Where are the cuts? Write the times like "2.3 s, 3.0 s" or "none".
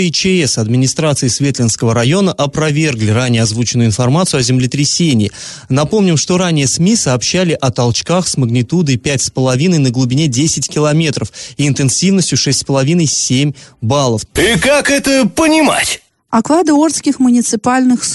14.3 s